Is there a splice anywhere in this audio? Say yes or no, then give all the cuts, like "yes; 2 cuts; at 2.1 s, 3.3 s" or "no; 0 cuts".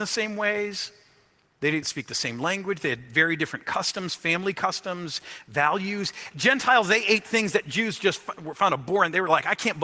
yes; 2 cuts; at 1.8 s, 6.3 s